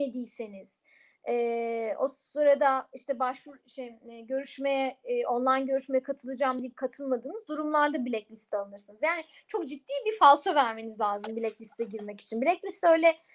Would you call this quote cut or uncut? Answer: uncut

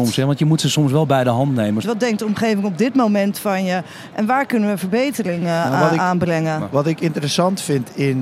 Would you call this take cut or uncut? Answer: cut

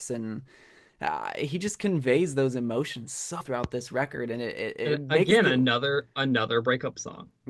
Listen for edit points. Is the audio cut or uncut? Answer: cut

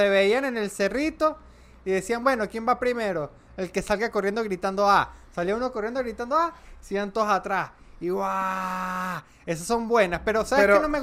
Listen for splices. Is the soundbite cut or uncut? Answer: uncut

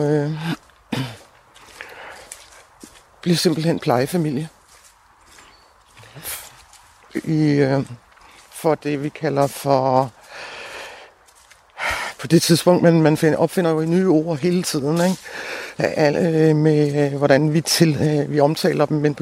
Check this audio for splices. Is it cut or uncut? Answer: uncut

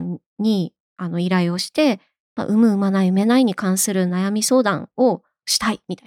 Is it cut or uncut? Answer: uncut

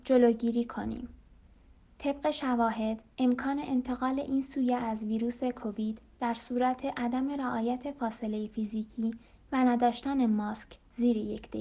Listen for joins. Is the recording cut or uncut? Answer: uncut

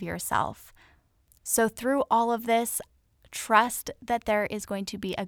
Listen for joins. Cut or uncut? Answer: uncut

